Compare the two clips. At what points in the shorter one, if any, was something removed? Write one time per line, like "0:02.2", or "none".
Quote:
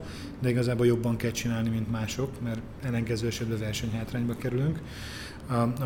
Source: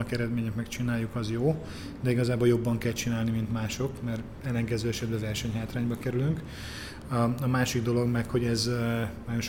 none